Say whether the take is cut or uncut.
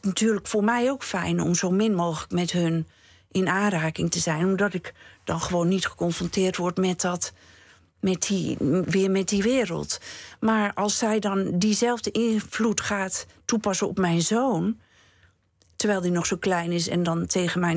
uncut